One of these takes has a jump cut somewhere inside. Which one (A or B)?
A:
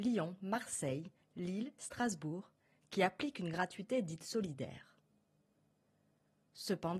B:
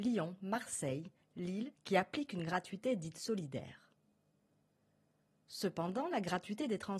B